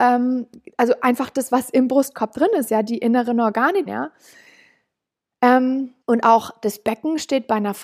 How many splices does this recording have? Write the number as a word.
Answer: two